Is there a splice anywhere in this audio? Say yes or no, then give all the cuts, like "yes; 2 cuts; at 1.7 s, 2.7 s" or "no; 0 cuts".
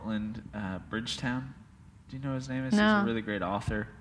no; 0 cuts